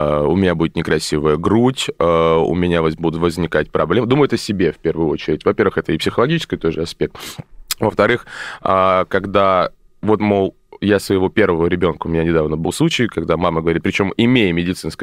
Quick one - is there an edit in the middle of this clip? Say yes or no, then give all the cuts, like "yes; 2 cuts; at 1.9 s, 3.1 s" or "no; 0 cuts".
no; 0 cuts